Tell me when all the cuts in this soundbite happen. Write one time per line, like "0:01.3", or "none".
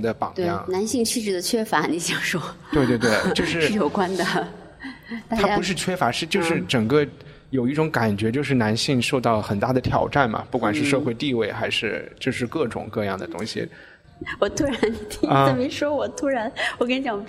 none

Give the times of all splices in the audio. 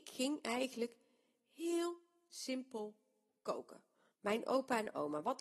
0:04.1

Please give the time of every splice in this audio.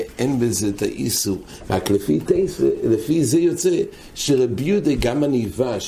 0:05.0

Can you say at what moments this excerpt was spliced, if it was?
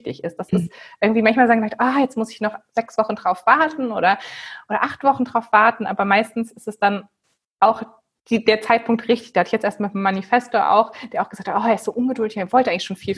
none

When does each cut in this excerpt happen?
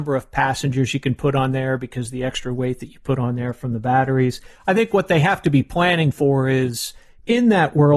0:04.5

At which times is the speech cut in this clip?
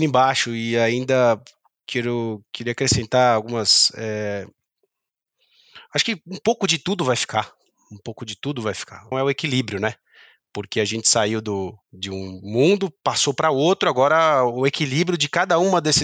0:09.1
0:11.8

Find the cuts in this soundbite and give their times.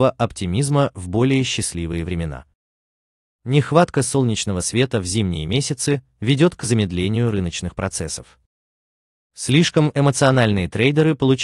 none

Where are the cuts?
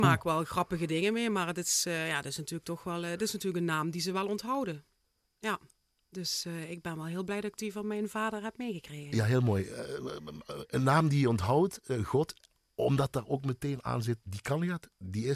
none

